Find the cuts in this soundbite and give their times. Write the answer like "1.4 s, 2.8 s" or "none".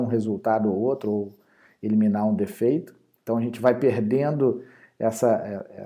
none